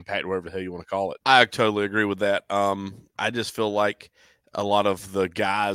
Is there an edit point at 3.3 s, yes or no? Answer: no